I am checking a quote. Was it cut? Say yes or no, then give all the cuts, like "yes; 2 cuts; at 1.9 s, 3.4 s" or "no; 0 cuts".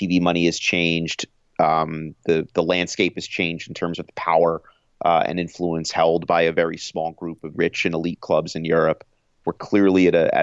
yes; 3 cuts; at 2.2 s, 7.5 s, 9.4 s